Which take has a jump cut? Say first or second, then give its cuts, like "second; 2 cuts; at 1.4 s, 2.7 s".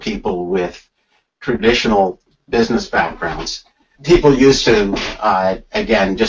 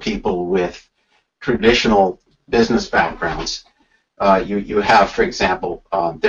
first; 1 cut; at 4.0 s